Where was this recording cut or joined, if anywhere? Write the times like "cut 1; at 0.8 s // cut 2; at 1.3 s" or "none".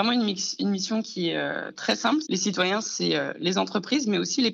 cut 1; at 2.2 s